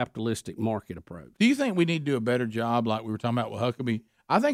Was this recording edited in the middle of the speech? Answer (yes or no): yes